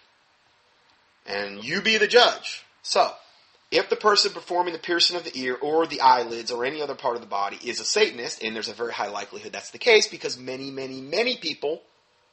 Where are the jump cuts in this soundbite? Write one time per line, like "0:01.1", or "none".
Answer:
0:02.8